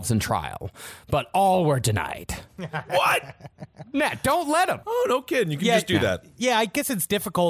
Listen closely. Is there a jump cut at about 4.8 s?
yes; 1 cut; at 4.8 s

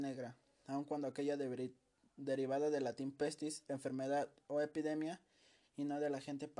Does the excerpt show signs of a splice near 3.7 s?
yes; 1 cut; at 3.7 s

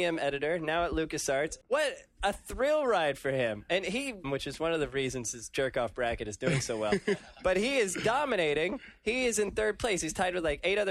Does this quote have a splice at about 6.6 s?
no; 2 cuts; at 1.6 s, 4.2 s

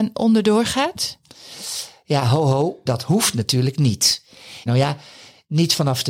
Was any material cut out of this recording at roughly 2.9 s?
yes; 2 cuts; at 2.9 s, 4.7 s

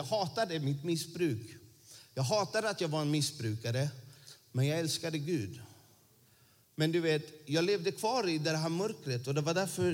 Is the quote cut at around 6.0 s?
no; 0 cuts

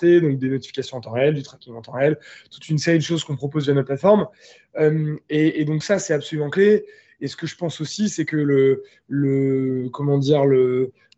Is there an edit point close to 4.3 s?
no; 0 cuts

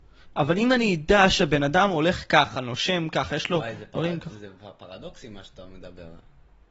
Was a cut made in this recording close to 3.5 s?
no; 0 cuts

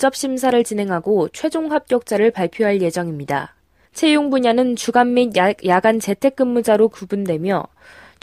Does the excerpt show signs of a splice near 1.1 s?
no; 1 cut; at 3.9 s

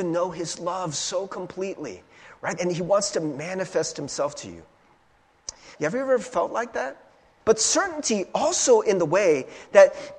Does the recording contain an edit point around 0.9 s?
no; 3 cuts; at 2.6 s, 5.7 s, 7.4 s

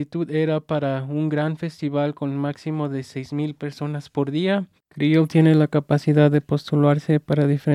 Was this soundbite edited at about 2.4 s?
no; 1 cut; at 4.8 s

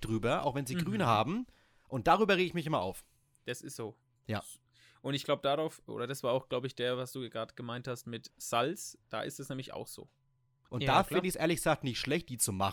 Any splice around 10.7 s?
yes; 2 cuts; at 8.3 s, 10.7 s

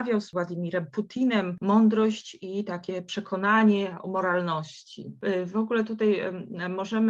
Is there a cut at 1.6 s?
yes; 1 cut; at 1.6 s

